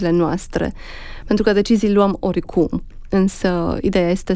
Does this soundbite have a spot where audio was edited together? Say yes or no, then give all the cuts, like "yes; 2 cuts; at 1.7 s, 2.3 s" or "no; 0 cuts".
no; 0 cuts